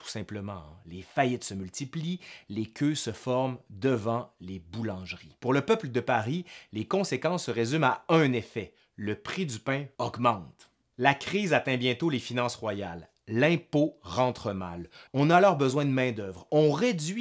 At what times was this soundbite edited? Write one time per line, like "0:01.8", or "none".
0:15.1